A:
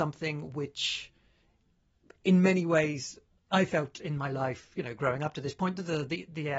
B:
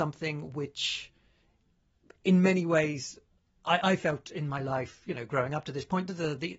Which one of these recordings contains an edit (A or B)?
A